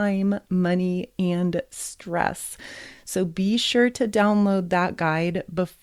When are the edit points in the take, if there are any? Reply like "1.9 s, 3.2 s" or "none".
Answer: none